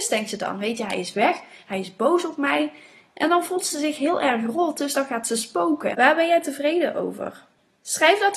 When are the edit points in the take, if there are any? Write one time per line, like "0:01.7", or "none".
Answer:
0:05.9